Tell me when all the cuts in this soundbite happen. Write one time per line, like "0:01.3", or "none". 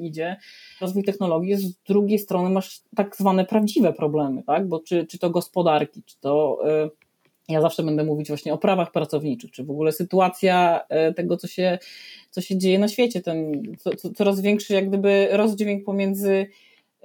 0:02.8